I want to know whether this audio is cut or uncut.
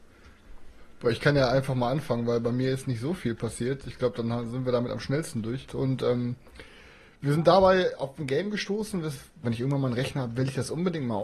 cut